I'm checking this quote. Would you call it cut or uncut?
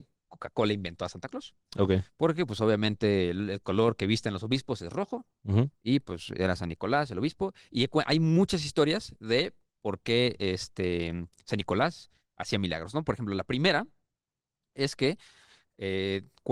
uncut